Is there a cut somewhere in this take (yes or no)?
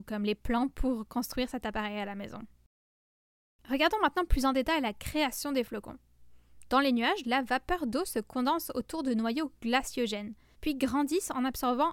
yes